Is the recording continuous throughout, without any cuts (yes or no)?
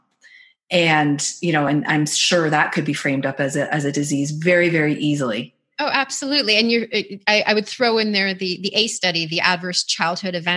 yes